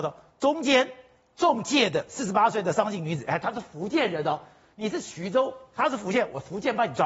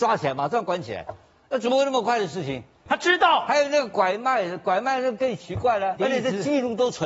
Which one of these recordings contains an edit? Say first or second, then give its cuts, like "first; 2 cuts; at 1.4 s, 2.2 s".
second; 2 cuts; at 2.9 s, 6.0 s